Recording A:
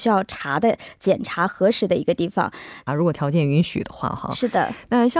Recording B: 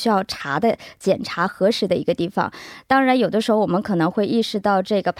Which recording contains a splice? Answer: A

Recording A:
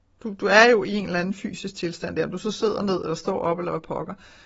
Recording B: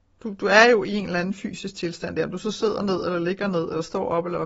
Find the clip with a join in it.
A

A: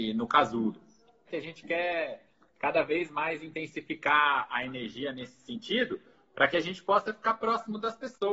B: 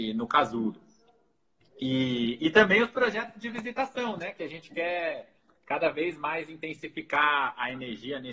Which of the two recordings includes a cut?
A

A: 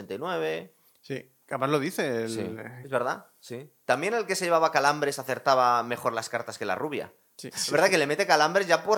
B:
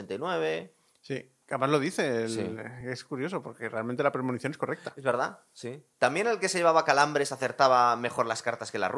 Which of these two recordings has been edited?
A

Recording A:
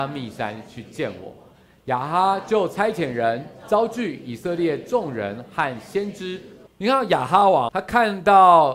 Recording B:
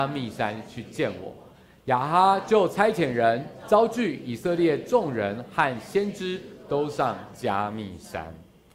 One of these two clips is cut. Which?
A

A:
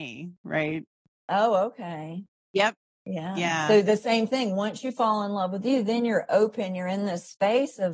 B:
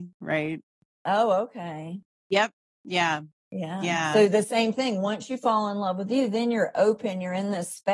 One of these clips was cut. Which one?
A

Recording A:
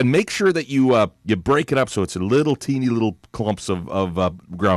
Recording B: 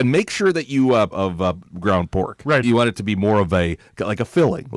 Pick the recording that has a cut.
B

